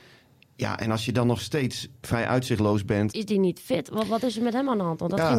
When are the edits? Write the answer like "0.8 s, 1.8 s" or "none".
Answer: 2.0 s, 3.1 s